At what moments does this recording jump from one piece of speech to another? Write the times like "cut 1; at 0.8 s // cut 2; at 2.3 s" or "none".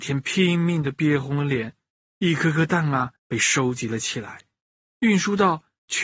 cut 1; at 2.1 s // cut 2; at 3.2 s